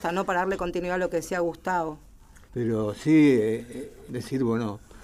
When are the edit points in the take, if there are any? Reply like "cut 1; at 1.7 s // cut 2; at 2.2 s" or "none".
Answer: cut 1; at 2.5 s // cut 2; at 4.1 s